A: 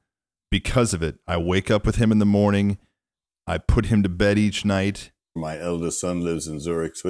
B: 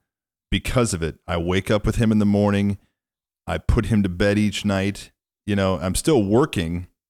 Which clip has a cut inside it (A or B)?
A